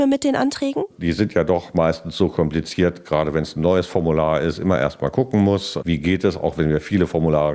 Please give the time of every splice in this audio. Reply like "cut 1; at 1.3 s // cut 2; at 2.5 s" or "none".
cut 1; at 3.0 s